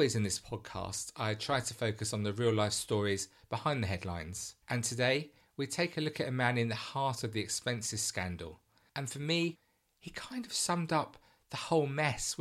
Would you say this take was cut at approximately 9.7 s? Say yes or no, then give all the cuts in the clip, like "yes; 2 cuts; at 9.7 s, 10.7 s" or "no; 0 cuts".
no; 1 cut; at 4.6 s